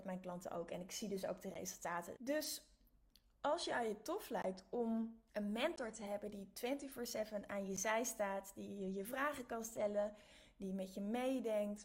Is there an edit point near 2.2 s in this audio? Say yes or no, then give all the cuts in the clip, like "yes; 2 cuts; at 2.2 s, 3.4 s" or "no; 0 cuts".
yes; 2 cuts; at 2.2 s, 5.3 s